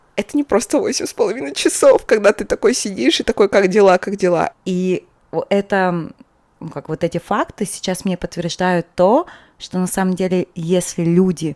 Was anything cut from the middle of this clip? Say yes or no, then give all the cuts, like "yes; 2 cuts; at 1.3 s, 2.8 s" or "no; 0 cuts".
yes; 1 cut; at 4.5 s